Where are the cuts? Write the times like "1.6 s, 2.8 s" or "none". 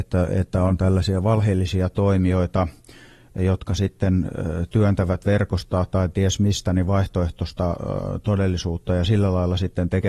none

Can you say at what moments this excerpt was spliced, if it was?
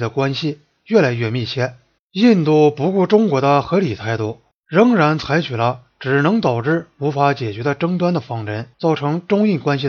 2.0 s, 8.7 s

